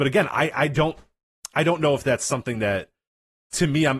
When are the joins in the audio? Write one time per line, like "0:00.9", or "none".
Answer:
none

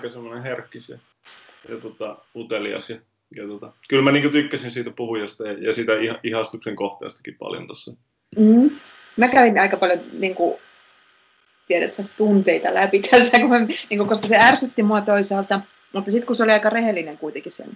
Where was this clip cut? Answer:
none

